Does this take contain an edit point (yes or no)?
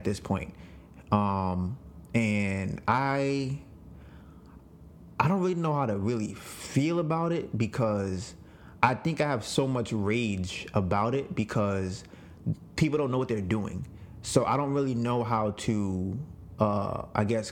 no